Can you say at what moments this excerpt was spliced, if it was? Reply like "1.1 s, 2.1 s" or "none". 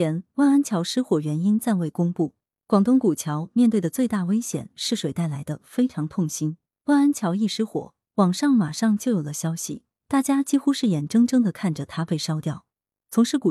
none